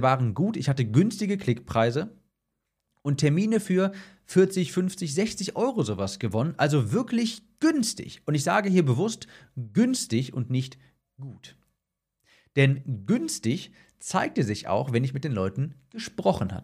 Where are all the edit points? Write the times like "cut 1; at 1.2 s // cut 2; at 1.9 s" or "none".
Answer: none